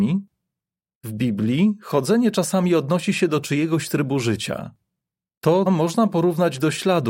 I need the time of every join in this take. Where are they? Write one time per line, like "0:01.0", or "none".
0:05.7